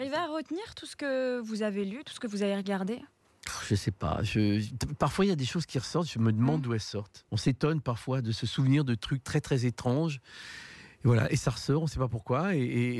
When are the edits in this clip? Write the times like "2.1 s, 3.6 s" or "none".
7.3 s